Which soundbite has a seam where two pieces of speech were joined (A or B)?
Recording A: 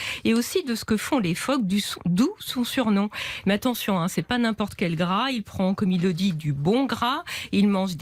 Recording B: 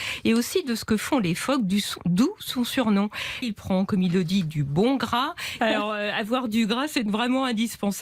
B